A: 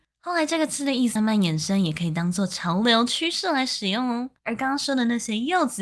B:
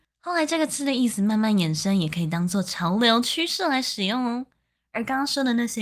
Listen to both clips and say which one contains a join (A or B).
A